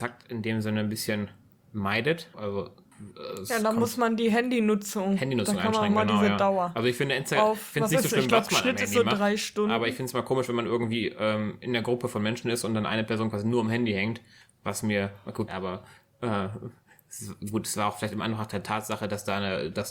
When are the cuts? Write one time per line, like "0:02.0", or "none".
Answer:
0:02.3
0:15.5